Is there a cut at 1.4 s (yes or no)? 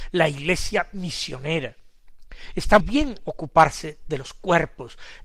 no